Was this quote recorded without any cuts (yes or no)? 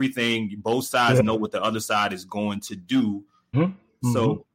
no